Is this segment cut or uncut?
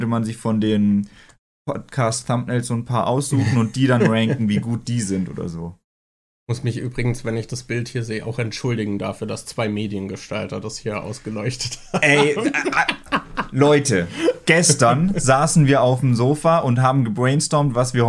uncut